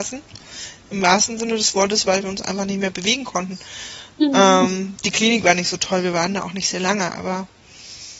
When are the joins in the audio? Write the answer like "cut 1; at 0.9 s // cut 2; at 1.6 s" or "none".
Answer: none